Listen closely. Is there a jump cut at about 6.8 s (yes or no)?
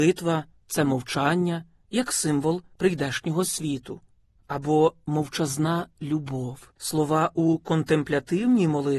yes